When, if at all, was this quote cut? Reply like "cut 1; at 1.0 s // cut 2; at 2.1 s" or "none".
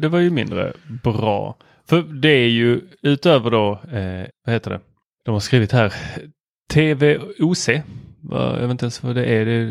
cut 1; at 4.3 s